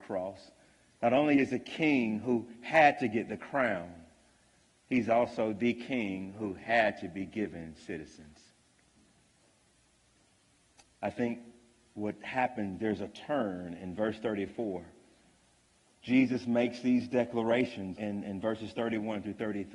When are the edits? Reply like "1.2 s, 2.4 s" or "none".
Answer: 18.0 s